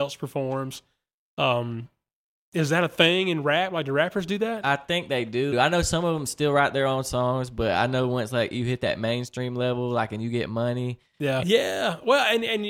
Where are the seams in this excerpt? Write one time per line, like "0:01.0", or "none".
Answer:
0:05.5
0:11.4